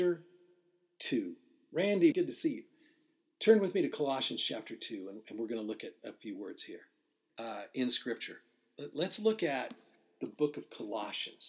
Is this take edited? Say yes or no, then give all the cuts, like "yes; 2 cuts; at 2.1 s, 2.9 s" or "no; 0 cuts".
yes; 2 cuts; at 2.1 s, 7.3 s